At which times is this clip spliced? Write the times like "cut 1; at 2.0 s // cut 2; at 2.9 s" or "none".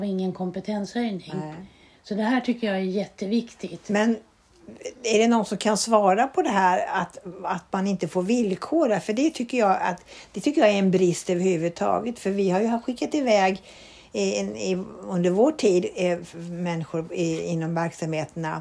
none